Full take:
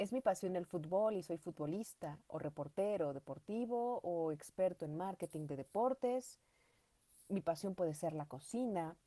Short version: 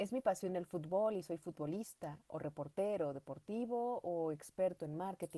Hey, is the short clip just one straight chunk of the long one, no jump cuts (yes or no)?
yes